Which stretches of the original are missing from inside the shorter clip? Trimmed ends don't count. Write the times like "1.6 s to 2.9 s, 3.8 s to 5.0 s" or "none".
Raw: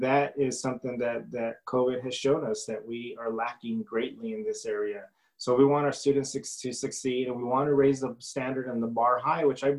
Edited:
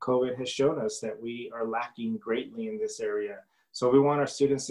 none